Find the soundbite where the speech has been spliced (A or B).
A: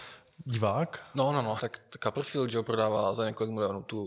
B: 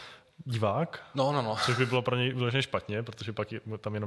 A